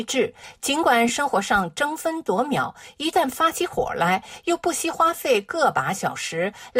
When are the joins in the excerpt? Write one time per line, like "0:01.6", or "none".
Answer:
none